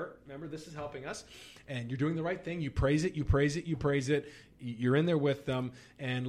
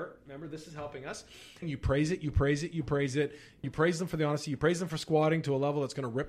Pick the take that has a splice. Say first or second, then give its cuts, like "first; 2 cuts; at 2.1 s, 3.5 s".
second; 2 cuts; at 1.6 s, 3.6 s